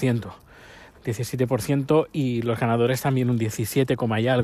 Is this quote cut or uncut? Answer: uncut